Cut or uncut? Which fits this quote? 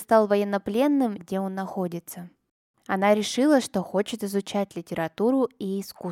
cut